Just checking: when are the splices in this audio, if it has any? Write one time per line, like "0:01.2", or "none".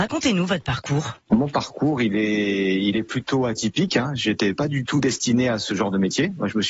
none